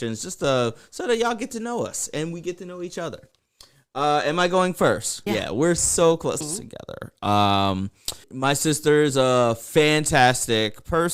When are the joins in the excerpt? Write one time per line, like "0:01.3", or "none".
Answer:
0:05.3
0:06.4
0:08.2